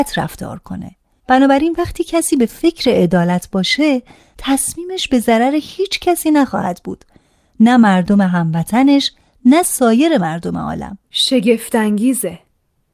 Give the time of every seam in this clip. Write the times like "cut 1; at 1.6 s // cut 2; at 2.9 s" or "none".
cut 1; at 11.0 s

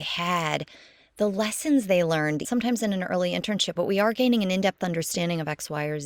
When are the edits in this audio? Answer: cut 1; at 2.4 s // cut 2; at 3.8 s

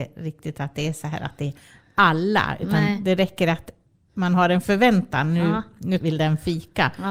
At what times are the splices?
cut 1; at 6.0 s

